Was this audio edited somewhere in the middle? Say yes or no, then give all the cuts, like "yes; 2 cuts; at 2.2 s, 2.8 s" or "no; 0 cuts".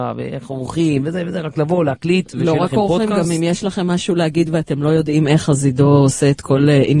no; 0 cuts